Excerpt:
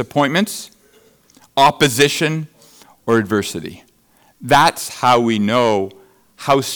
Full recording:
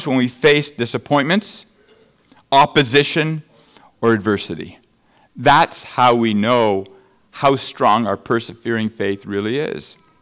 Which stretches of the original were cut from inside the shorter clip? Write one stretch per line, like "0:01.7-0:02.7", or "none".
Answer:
none